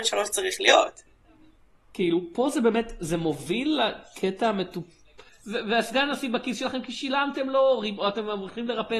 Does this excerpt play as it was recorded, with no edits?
no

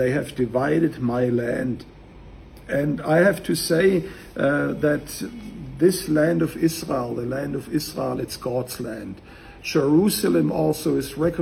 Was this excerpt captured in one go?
no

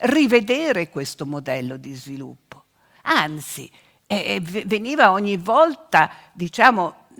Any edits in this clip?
yes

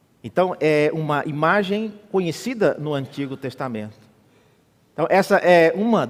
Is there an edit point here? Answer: no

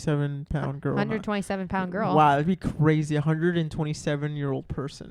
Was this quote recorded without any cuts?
yes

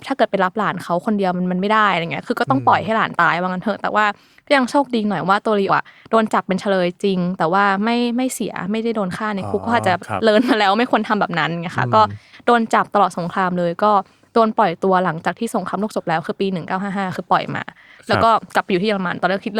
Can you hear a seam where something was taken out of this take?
yes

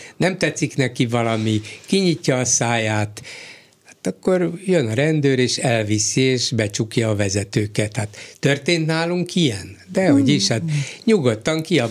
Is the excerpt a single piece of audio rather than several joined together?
yes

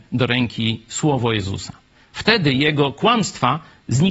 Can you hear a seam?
no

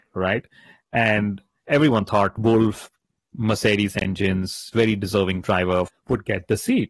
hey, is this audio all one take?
no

